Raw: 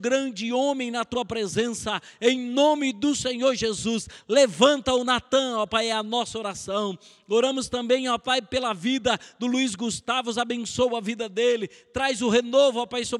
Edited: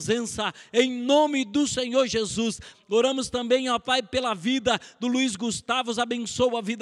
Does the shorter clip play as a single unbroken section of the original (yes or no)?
no